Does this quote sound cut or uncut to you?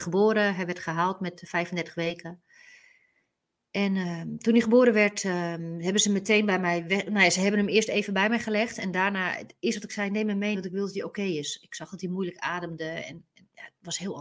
cut